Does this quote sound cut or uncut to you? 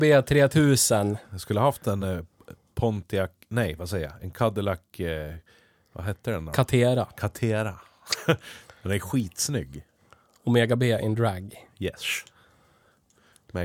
uncut